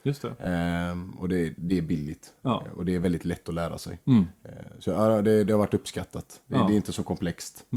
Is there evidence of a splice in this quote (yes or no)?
no